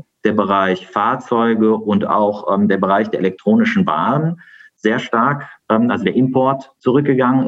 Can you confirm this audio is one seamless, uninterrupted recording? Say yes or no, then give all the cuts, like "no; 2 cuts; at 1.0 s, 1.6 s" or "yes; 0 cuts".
yes; 0 cuts